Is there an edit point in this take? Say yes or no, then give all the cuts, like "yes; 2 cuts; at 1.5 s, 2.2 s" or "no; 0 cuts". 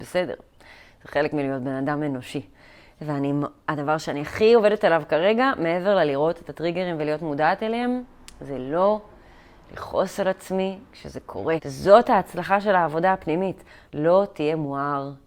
yes; 2 cuts; at 11.6 s, 13.9 s